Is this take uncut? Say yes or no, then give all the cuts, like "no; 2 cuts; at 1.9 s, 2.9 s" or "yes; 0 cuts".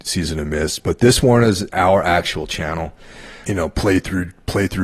no; 1 cut; at 3.4 s